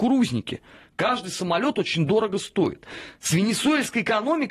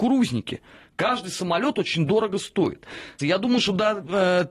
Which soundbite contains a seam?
second; 1 cut; at 3.2 s

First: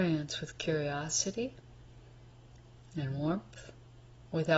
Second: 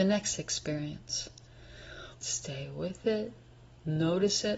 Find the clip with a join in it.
second; 1 cut; at 2.1 s

